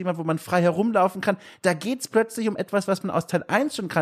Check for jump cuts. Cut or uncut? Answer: uncut